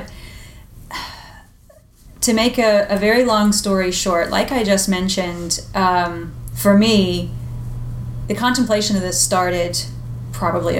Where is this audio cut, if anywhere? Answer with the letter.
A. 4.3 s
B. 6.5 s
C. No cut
B